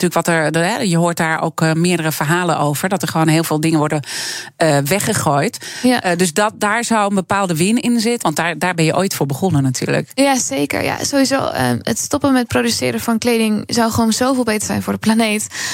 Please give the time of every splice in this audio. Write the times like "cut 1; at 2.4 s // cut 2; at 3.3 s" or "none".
cut 1; at 8.2 s